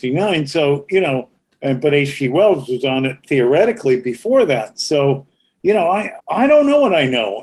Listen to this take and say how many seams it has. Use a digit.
1